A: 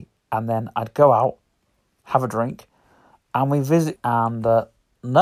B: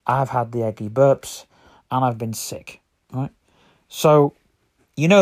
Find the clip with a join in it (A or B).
A